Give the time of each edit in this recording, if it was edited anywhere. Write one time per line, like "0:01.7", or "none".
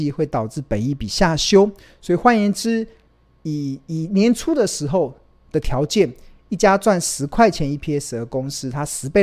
none